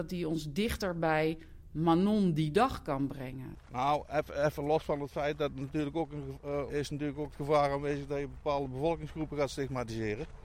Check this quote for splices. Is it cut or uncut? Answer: cut